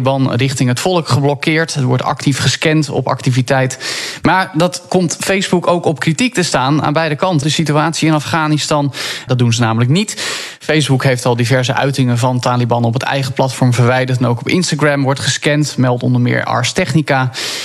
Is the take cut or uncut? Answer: cut